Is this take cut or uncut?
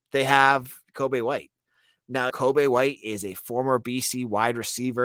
cut